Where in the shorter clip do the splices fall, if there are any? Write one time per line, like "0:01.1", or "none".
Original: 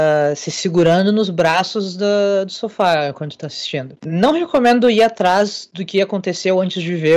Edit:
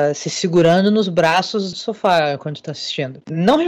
0:01.7

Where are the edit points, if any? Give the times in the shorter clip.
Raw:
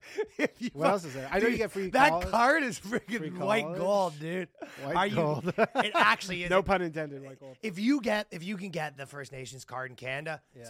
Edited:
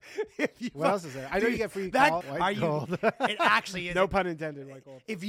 0:02.2

